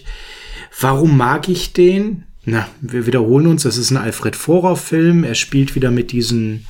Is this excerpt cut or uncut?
uncut